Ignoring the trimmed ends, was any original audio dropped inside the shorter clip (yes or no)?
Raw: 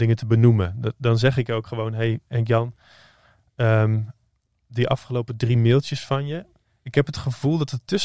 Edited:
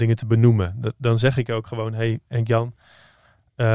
no